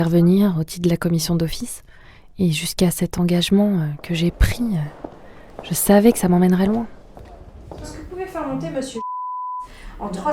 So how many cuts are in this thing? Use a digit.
0